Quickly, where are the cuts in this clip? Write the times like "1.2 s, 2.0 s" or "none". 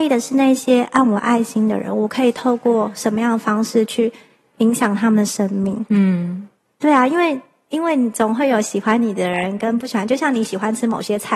none